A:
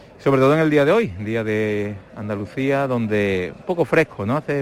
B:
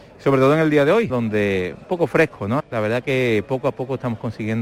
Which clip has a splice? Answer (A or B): B